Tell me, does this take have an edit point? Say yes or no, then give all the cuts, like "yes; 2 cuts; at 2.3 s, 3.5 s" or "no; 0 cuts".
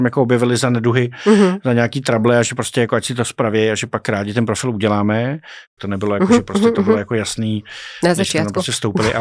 yes; 1 cut; at 5.8 s